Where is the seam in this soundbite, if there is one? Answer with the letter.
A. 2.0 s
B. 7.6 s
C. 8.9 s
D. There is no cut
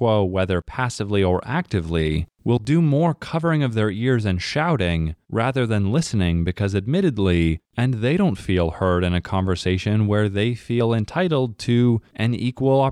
B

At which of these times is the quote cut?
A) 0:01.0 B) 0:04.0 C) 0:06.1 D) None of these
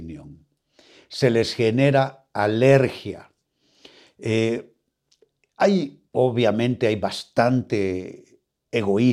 C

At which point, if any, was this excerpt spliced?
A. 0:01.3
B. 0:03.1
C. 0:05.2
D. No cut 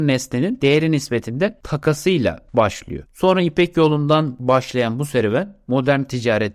B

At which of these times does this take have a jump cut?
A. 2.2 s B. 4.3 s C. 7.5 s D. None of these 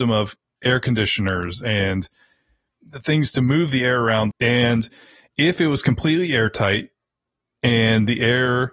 B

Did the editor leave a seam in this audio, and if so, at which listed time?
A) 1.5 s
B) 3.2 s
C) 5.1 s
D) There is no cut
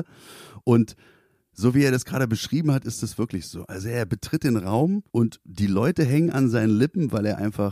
C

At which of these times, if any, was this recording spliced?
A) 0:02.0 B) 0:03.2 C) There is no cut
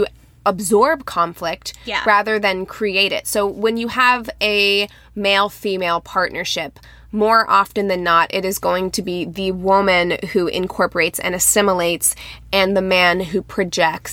C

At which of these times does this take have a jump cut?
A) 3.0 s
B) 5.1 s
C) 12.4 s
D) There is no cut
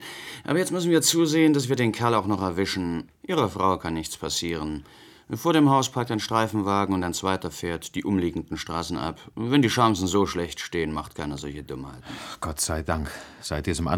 A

